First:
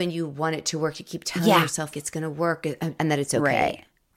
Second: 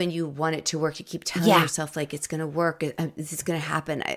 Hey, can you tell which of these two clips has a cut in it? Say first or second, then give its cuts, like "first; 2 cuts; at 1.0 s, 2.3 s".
first; 2 cuts; at 1.9 s, 3.0 s